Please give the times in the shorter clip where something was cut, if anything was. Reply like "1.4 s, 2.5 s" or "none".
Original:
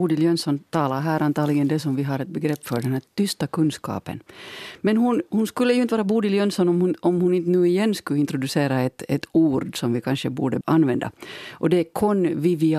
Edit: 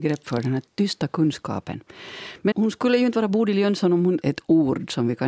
2.5 s, 4.2 s

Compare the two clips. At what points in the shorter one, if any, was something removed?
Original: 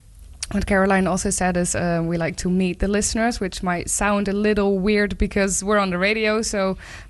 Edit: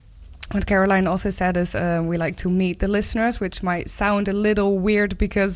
none

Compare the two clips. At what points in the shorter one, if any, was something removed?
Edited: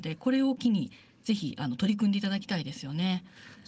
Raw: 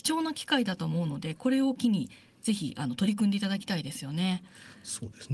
none

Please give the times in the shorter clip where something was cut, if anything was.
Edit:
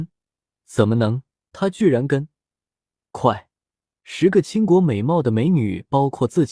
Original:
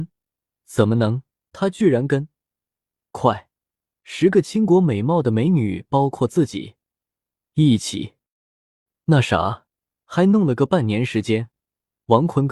none

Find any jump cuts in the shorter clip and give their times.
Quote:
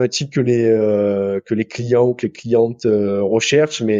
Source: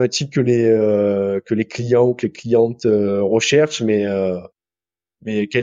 none

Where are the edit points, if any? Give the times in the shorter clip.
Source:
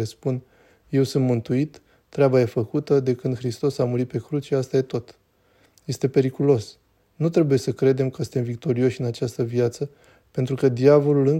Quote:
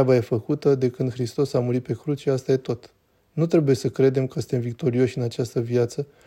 3.2 s

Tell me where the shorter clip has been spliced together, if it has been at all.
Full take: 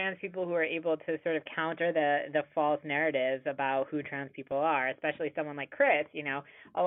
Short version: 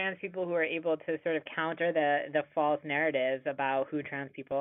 none

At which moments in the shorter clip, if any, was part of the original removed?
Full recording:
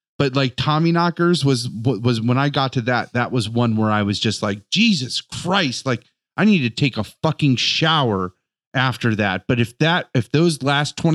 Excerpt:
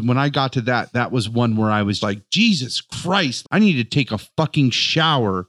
2.0 s, 3.4 s

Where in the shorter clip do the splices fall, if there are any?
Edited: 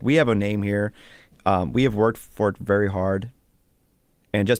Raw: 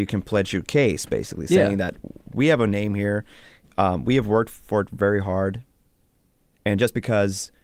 none

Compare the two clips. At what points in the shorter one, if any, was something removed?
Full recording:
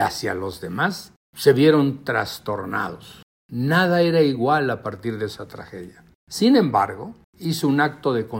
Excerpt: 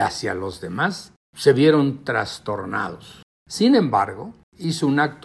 3.4 s

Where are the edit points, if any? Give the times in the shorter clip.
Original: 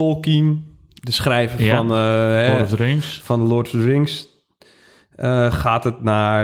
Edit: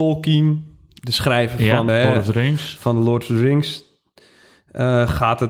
1.9 s

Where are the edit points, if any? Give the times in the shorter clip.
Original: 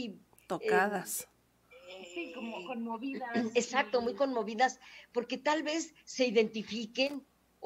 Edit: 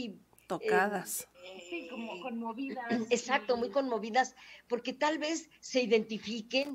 1.3 s

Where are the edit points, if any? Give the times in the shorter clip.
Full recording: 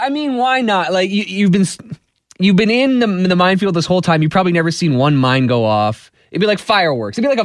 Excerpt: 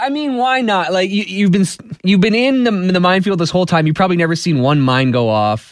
2.0 s

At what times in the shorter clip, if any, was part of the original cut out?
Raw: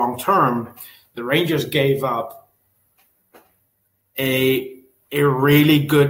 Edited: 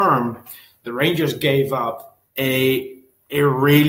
2.3 s

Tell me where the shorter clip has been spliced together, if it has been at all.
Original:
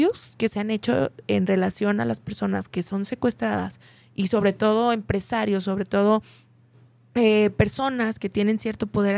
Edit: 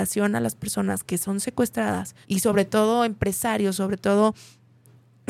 2.2 s

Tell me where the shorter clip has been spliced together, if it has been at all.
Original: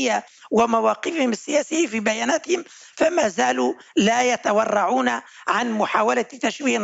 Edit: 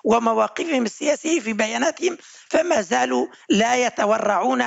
none

